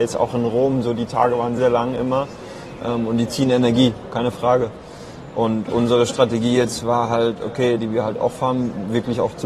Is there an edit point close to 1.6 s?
yes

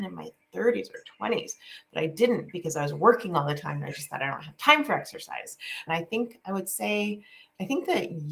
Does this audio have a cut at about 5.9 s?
yes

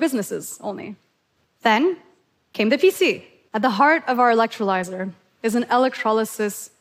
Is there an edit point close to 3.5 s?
yes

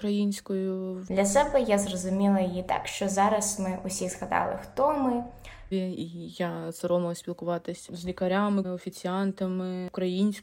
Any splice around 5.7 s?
yes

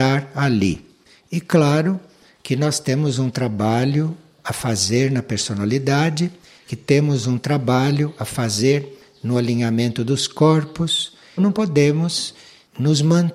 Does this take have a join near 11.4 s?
yes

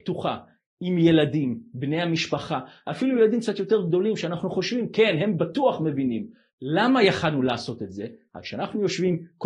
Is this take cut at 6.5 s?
yes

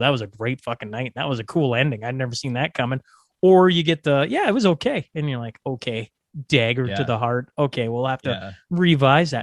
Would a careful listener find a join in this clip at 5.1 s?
no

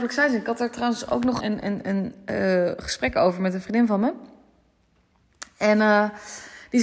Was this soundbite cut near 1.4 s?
yes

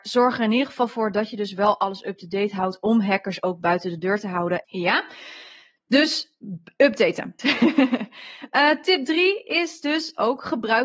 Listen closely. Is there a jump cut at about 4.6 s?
yes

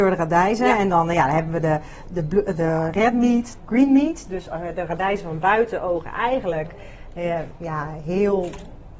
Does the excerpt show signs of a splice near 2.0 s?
yes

